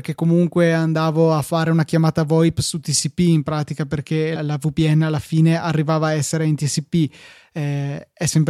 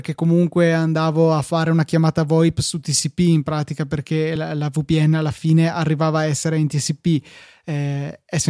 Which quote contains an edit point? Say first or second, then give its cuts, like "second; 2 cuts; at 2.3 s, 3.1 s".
first; 1 cut; at 4.4 s